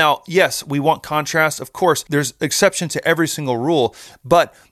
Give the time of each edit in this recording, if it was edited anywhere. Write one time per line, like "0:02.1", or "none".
none